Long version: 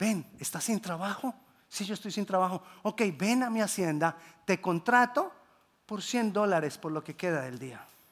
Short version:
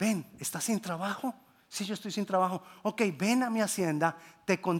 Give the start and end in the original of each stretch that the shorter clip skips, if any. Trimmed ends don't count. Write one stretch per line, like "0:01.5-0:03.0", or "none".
none